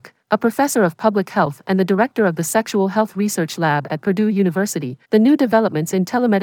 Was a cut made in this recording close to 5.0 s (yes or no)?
yes